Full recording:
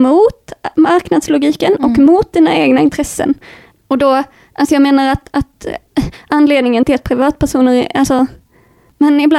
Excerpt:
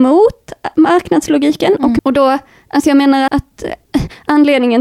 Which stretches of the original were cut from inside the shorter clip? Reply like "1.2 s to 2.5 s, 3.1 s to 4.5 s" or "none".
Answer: 2.0 s to 3.8 s, 5.1 s to 5.3 s